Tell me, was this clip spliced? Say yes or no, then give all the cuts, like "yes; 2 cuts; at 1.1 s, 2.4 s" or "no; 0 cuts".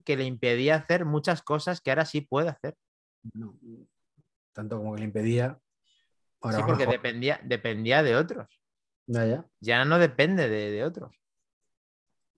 yes; 1 cut; at 9.5 s